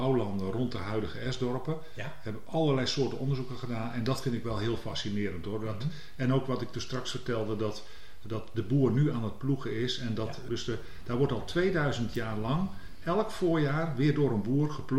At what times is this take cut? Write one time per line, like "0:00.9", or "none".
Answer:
0:10.5